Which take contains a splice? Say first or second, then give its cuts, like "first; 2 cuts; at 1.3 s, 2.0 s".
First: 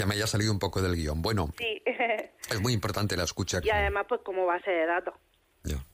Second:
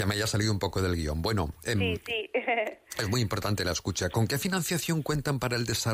first; 2 cuts; at 1.5 s, 3.6 s